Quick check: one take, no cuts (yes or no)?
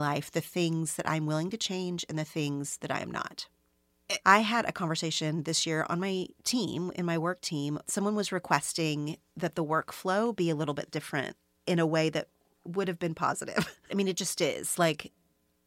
no